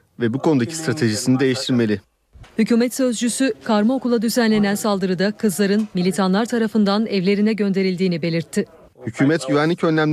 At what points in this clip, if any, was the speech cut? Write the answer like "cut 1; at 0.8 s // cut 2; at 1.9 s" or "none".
cut 1; at 2.4 s // cut 2; at 8.9 s

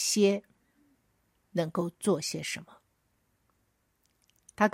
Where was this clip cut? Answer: none

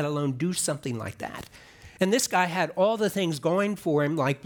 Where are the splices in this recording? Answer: none

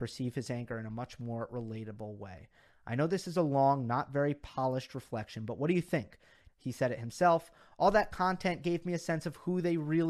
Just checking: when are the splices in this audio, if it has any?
cut 1; at 6.5 s

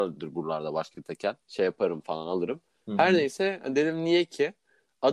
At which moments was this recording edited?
cut 1; at 1.4 s

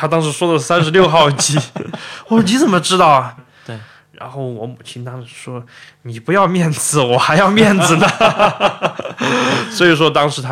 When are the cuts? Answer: cut 1; at 3.4 s

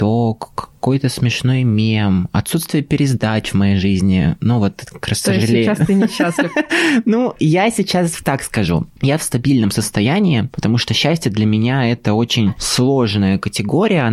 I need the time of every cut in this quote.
none

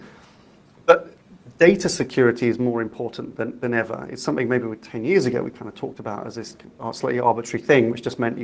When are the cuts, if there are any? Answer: none

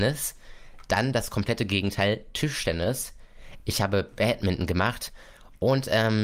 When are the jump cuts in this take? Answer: none

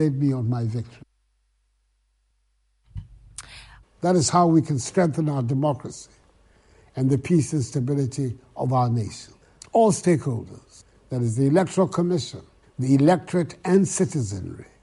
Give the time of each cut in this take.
cut 1; at 3.8 s // cut 2; at 9.6 s // cut 3; at 12.6 s

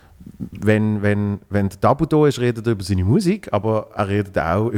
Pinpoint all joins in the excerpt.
none

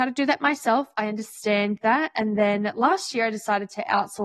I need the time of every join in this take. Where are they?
none

